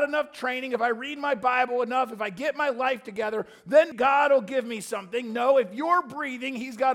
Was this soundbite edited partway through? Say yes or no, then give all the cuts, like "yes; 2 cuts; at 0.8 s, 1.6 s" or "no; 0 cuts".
yes; 1 cut; at 3.9 s